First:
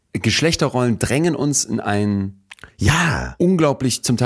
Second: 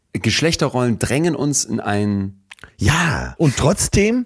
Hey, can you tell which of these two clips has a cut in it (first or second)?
second